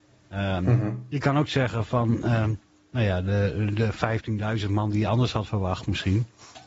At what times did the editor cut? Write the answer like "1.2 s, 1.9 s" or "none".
none